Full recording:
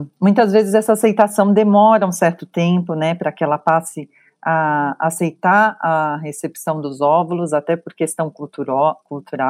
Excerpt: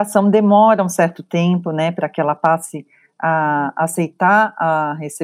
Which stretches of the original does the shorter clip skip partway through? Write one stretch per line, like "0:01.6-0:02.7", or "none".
none